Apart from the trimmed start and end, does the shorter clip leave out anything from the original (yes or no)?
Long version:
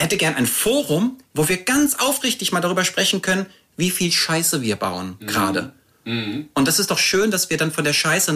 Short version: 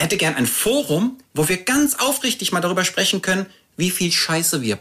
no